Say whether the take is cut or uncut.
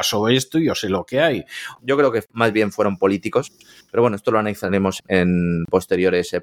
cut